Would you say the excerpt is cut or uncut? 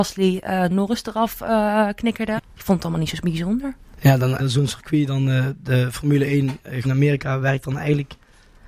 cut